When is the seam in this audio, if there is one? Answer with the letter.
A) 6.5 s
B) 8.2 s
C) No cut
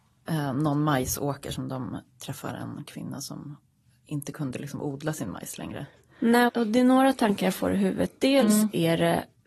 A